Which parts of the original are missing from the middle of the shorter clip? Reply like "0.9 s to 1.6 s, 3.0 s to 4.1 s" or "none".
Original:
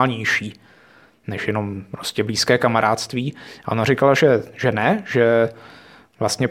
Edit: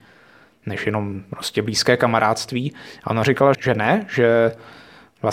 4.2 s to 4.5 s